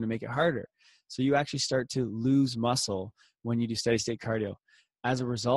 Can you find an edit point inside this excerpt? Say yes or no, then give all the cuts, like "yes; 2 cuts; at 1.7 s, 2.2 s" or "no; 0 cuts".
no; 0 cuts